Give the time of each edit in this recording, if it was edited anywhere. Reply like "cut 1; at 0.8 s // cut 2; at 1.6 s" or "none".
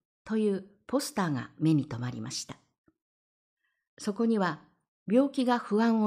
cut 1; at 5.0 s

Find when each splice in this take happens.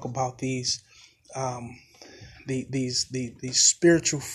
none

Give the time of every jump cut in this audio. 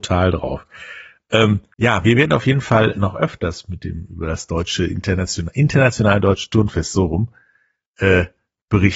cut 1; at 1.7 s // cut 2; at 2.9 s

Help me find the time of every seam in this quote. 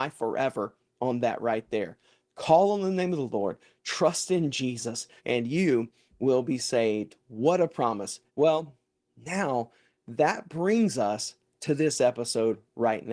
cut 1; at 5.2 s // cut 2; at 8.3 s

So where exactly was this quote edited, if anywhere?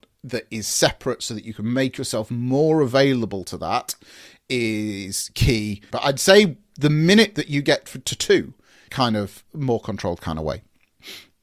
cut 1; at 5.9 s // cut 2; at 8.9 s

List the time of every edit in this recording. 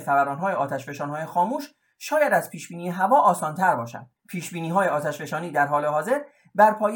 cut 1; at 4.2 s

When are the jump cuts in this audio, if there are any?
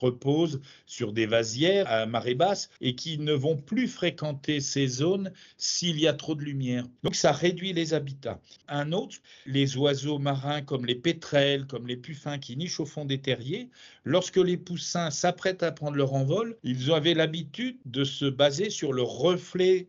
none

